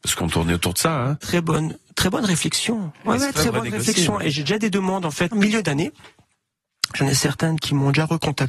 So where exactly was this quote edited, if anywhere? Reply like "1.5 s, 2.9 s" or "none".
3.3 s, 5.3 s

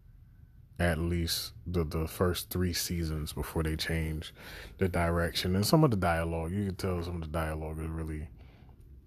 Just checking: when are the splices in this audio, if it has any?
none

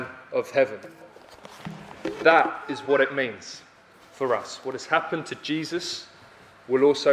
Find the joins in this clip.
none

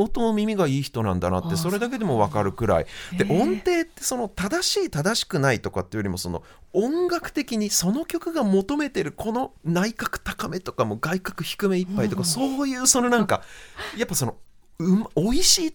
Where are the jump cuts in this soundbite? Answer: 9.6 s

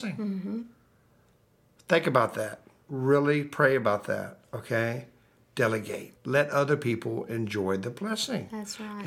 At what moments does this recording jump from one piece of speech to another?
6.2 s

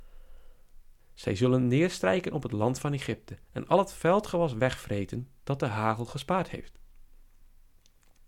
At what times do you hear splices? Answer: 1.0 s, 3.4 s

